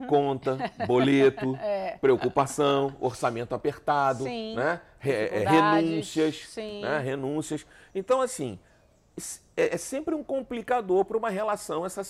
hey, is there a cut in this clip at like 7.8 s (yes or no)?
no